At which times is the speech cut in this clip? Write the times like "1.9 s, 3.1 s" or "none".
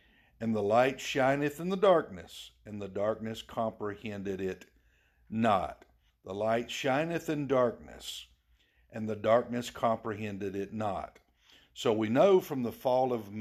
6.1 s